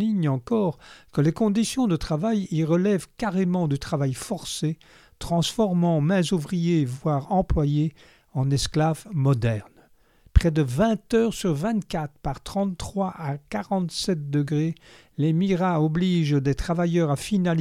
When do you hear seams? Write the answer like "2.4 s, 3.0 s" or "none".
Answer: none

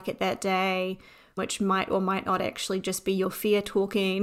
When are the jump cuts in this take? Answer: 1.4 s

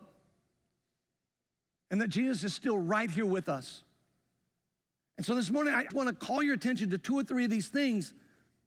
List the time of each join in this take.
5.9 s

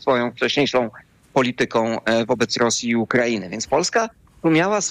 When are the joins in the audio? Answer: none

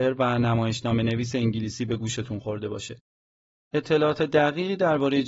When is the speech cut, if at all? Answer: none

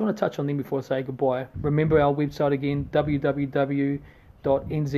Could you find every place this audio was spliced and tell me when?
1.5 s

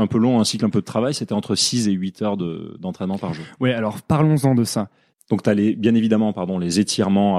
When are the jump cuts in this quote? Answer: 5.1 s

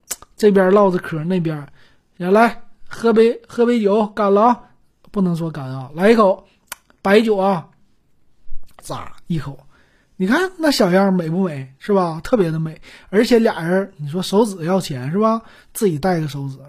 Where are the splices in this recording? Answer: 8.8 s

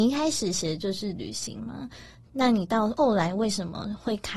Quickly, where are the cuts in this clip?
none

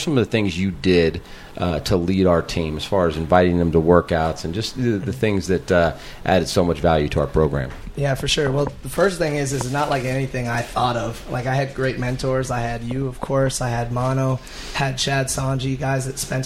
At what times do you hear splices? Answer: none

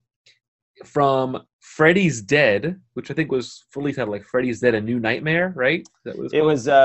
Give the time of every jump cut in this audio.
none

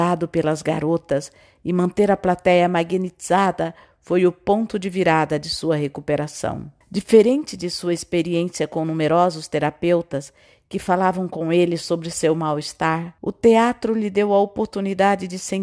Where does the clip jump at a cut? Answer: 6.8 s, 13.2 s

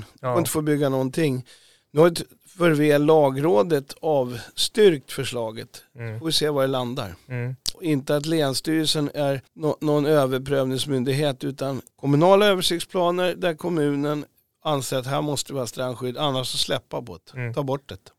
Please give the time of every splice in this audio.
7.7 s, 9.5 s, 11.9 s

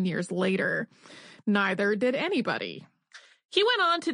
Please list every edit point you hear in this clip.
1.4 s

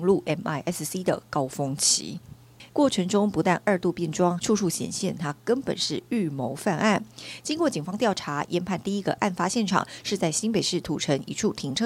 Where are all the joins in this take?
2.7 s, 4.4 s

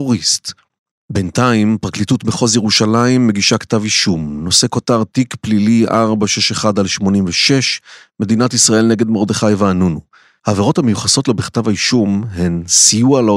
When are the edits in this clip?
10.4 s

